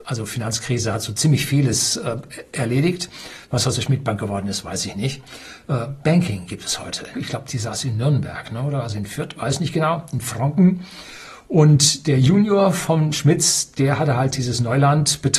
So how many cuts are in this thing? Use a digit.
1